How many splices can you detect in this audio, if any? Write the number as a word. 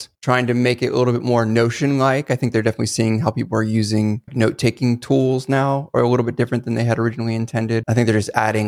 zero